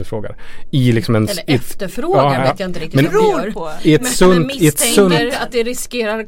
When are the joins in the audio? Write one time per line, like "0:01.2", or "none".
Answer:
none